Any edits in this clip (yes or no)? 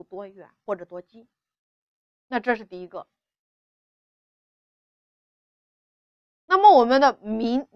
no